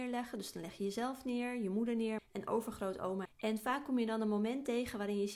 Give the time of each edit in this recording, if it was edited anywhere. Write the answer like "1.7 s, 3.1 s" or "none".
2.2 s, 3.3 s